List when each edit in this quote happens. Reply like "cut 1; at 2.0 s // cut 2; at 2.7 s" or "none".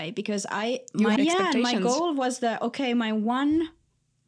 cut 1; at 1.2 s